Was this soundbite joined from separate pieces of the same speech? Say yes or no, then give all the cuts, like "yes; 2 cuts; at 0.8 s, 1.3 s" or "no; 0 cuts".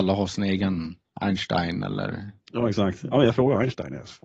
no; 0 cuts